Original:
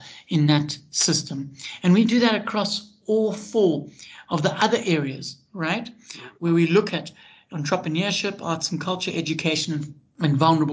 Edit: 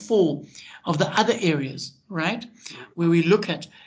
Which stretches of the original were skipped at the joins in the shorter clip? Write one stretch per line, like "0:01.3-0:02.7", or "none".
none